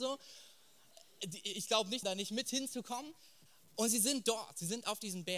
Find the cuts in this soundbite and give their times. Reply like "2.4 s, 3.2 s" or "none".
2.0 s